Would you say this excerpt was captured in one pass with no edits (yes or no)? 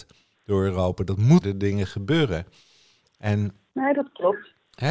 no